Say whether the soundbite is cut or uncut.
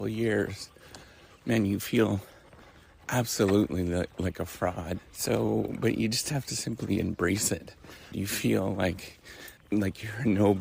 cut